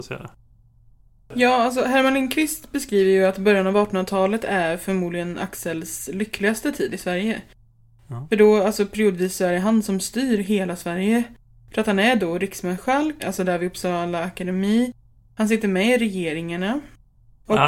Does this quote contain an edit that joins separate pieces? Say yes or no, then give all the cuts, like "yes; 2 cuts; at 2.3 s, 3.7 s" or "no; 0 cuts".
yes; 1 cut; at 13.2 s